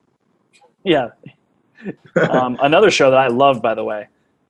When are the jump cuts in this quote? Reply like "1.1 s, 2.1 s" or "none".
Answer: 2.0 s

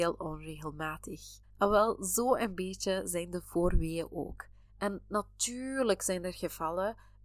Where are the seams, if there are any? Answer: 1.4 s, 4.6 s

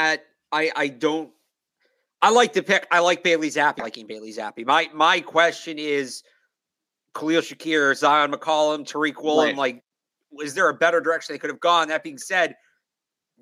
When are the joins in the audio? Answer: 3.8 s

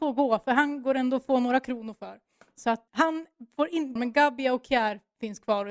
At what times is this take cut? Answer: 2.9 s, 4.0 s

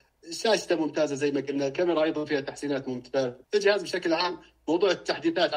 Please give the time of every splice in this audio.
3.4 s

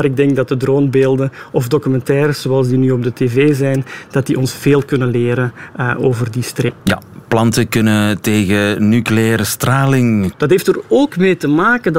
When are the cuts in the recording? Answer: 6.8 s, 10.3 s

